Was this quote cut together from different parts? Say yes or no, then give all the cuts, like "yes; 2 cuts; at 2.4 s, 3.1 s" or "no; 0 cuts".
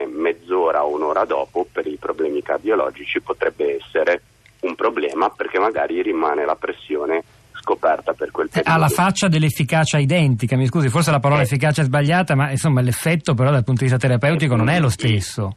no; 0 cuts